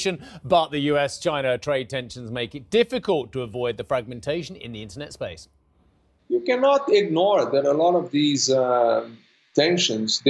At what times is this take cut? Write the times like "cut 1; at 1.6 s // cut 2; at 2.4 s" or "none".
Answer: none